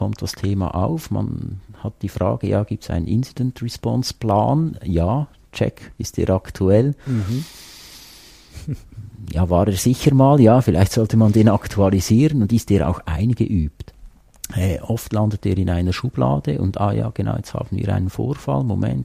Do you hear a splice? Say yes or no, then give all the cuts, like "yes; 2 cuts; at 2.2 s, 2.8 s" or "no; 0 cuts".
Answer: no; 0 cuts